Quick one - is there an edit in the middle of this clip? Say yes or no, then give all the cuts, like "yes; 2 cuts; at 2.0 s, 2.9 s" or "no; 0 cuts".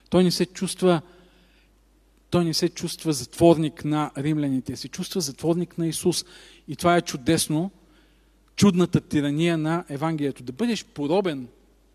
no; 0 cuts